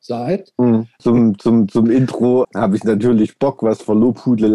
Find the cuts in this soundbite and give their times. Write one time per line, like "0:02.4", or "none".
0:01.0
0:02.4

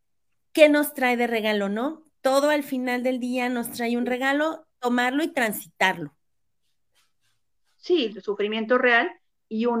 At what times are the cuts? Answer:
0:08.1

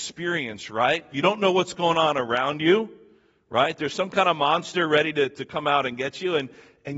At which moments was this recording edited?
0:01.1

